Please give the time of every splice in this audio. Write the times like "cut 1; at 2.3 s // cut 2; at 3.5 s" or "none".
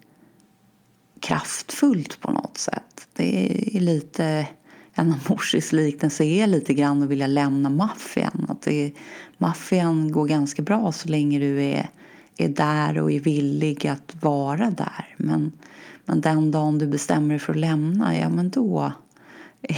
none